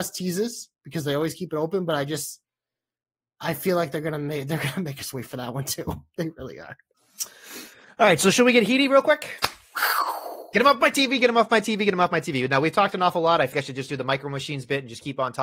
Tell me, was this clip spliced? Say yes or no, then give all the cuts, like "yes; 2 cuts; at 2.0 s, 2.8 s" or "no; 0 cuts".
yes; 1 cut; at 13.5 s